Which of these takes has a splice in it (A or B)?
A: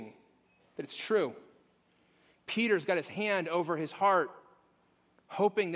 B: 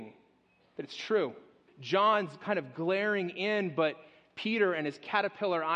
B